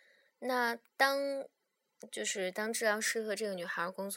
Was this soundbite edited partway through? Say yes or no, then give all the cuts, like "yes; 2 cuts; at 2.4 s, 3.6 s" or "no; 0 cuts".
no; 0 cuts